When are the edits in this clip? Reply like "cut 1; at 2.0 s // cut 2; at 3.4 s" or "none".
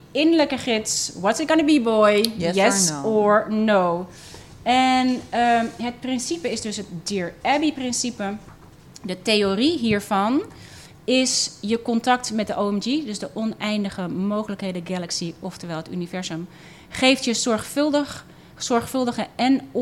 none